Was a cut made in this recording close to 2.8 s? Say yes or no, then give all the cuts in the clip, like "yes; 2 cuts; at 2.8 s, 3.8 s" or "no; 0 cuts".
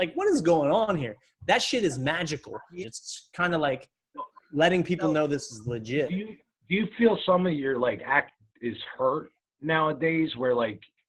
yes; 1 cut; at 2.8 s